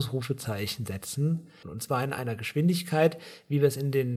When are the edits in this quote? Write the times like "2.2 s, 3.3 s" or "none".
1.6 s